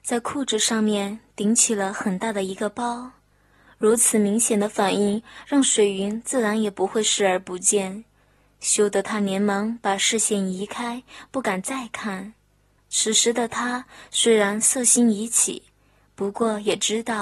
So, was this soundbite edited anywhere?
yes; 1 cut; at 12.8 s

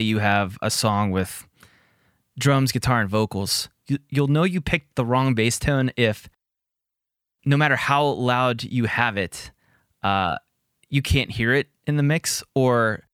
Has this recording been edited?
no; 0 cuts

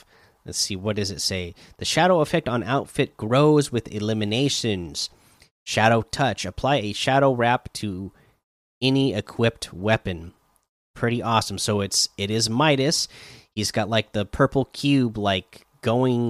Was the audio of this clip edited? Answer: no; 0 cuts

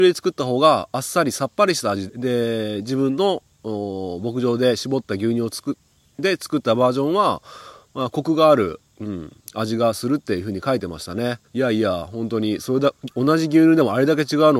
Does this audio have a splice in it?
yes; 2 cuts; at 2.1 s, 11.5 s

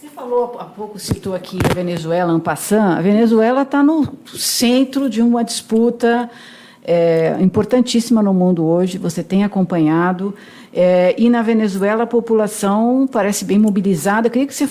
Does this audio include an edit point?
no; 0 cuts

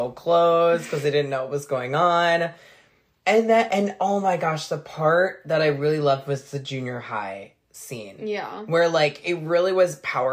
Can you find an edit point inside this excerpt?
no; 0 cuts

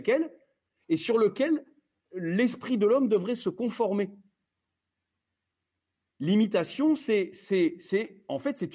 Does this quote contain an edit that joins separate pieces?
no; 0 cuts

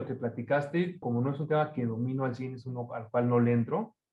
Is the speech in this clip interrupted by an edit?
yes; 1 cut; at 1.0 s

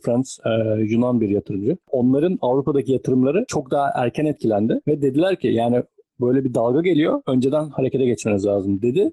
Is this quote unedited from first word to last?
yes; 0 cuts

